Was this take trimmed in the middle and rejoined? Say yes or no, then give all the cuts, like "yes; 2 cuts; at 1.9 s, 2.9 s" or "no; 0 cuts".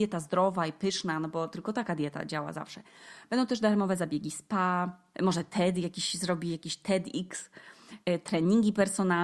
yes; 1 cut; at 5.1 s